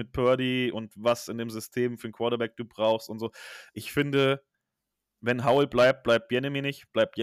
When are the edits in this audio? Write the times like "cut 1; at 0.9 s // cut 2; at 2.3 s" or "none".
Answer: none

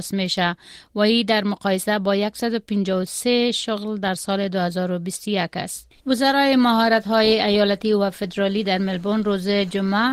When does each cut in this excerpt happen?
cut 1; at 6.0 s

